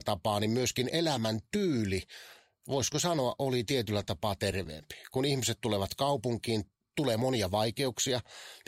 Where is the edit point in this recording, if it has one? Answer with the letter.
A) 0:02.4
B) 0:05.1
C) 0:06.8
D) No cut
D